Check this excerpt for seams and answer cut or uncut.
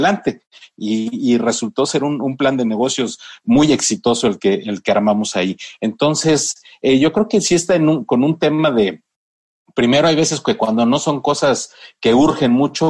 uncut